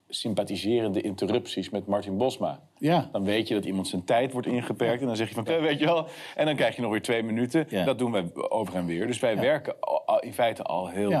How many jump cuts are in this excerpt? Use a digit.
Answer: 1